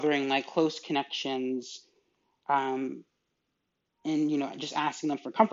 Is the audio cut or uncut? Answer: uncut